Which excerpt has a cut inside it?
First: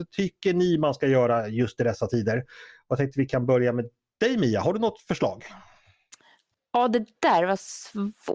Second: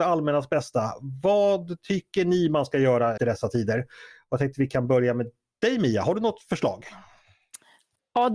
second; 1 cut; at 3.2 s

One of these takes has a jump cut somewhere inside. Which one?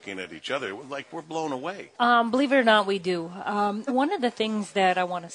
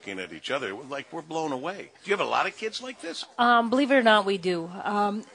first; 2 cuts; at 1.9 s, 3.9 s

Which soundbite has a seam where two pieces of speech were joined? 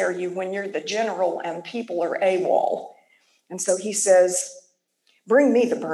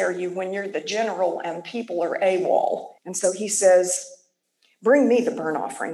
second; 1 cut; at 3.0 s

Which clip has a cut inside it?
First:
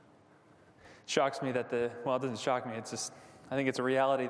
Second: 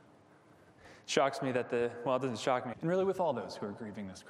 second; 1 cut; at 2.7 s

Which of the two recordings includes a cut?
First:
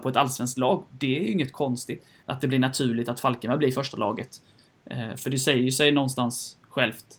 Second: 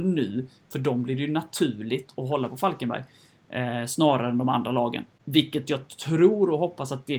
first; 1 cut; at 2.2 s

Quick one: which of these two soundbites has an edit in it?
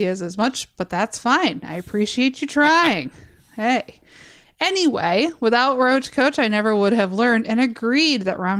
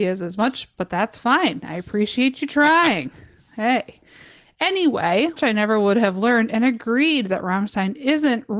second; 1 cut; at 5.4 s

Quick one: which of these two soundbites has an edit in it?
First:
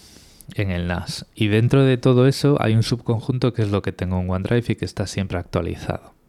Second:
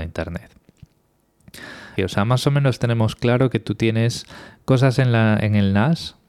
second; 1 cut; at 2.0 s

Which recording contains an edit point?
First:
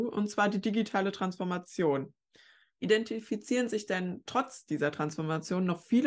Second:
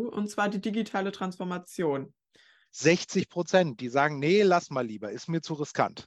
second; 1 cut; at 2.7 s

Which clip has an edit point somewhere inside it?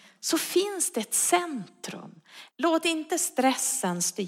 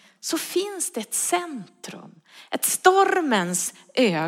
first; 1 cut; at 2.5 s

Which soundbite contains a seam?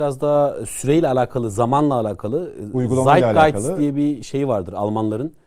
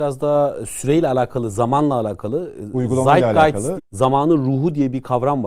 second; 1 cut; at 3.8 s

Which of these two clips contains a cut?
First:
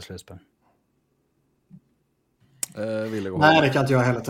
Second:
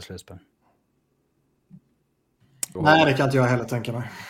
second; 1 cut; at 2.8 s

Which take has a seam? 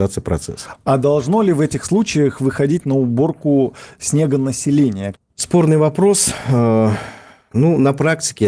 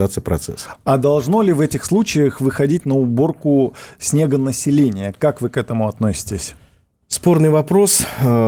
first; 1 cut; at 5.2 s

